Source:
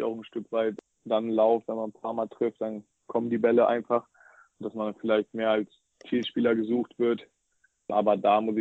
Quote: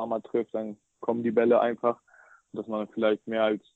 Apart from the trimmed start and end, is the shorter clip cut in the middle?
no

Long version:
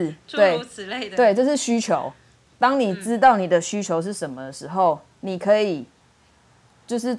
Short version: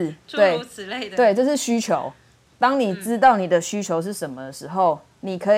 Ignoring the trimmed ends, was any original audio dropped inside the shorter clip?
no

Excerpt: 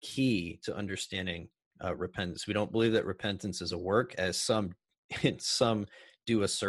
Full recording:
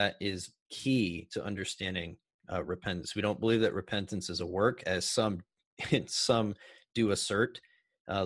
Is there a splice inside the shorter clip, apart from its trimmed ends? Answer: no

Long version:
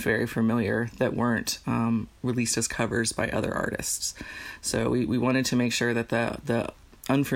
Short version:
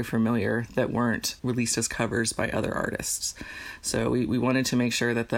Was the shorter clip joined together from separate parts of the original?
yes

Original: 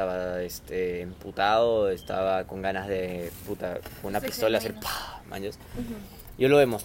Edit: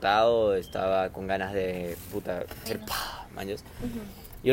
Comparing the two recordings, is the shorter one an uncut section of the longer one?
no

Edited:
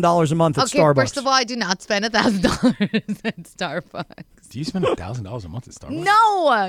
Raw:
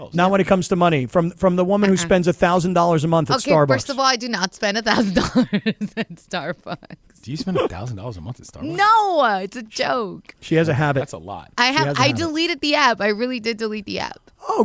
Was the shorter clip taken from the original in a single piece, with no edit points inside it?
yes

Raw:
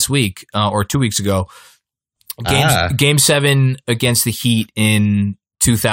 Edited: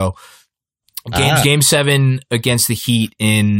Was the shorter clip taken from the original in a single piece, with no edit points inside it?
no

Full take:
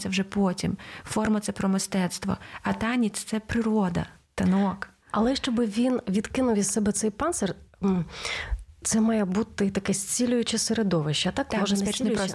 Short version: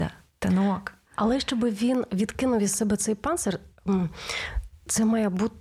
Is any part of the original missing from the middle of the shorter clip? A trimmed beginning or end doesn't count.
no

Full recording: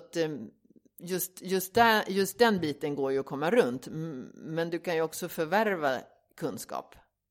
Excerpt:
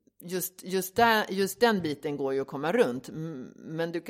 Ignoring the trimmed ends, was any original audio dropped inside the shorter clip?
no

